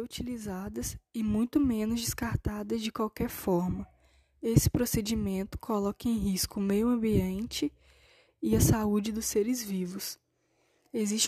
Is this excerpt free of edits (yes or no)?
yes